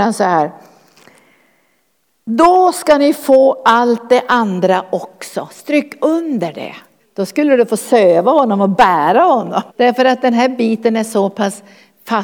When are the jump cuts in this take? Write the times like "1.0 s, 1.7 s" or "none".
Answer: 7.0 s, 9.7 s